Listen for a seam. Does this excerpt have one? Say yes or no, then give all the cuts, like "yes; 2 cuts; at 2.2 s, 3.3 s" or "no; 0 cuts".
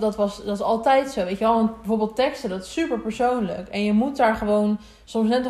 no; 0 cuts